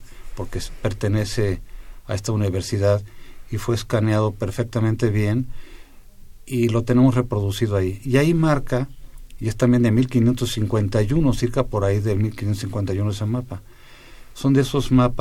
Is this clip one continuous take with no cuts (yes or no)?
yes